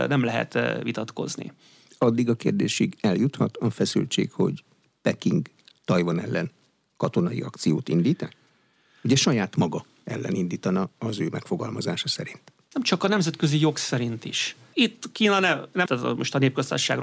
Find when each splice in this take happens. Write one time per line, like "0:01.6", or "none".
0:14.7
0:15.9